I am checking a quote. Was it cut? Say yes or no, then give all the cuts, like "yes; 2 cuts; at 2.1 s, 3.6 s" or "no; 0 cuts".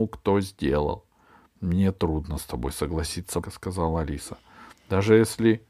yes; 1 cut; at 3.4 s